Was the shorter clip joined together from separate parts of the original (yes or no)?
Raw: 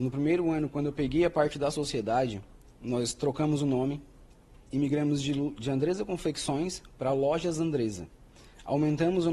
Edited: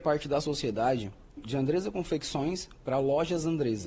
yes